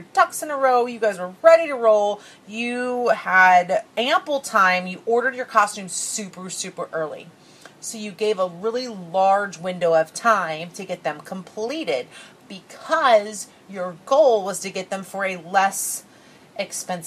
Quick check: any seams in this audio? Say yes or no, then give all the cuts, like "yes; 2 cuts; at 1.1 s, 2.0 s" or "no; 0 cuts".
no; 0 cuts